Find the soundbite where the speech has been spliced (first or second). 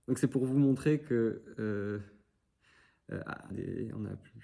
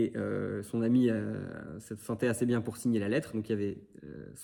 first